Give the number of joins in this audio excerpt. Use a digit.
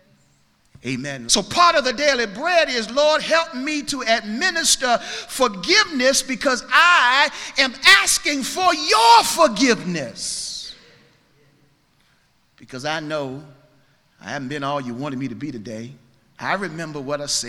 1